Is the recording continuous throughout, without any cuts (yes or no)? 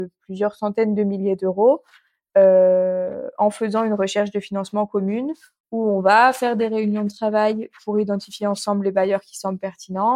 yes